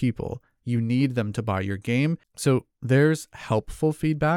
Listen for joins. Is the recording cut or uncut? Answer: cut